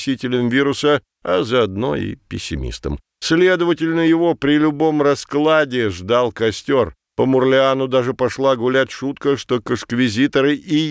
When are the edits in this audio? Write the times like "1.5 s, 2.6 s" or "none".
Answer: 7.1 s